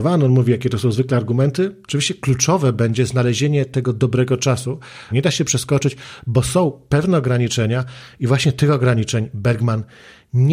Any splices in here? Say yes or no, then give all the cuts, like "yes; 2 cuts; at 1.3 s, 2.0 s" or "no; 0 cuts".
yes; 2 cuts; at 1.9 s, 5.1 s